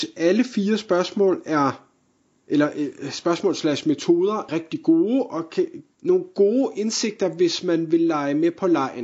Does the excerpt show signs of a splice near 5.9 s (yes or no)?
yes